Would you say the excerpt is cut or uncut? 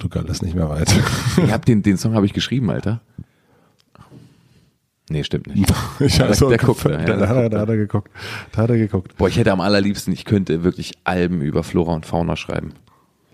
uncut